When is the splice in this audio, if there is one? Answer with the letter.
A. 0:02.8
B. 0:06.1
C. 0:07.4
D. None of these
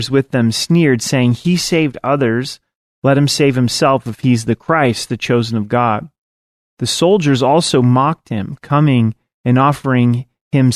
D